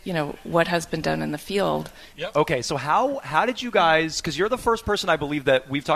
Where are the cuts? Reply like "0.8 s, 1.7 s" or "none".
2.1 s